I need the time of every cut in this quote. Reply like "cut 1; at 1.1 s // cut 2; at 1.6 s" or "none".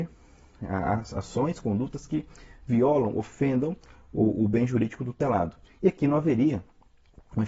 none